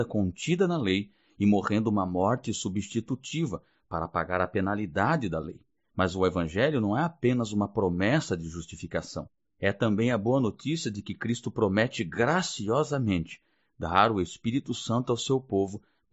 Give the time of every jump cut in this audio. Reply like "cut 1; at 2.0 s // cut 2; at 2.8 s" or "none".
none